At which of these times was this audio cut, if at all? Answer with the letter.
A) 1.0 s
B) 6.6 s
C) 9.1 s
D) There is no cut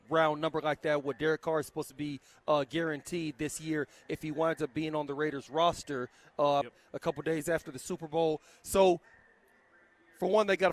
B